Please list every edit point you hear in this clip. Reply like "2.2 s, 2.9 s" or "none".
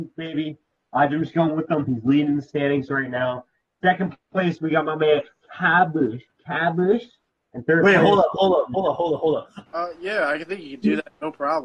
9.7 s